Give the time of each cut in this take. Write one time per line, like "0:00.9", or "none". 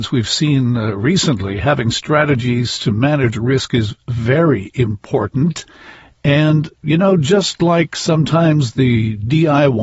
none